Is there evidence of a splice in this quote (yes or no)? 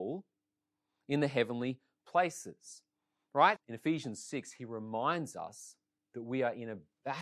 yes